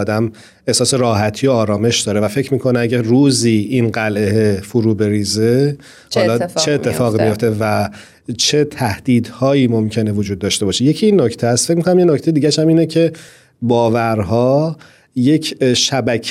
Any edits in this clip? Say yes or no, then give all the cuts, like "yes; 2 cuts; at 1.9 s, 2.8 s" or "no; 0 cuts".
no; 0 cuts